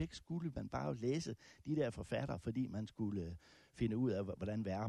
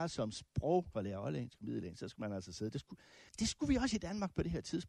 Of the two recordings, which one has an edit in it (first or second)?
second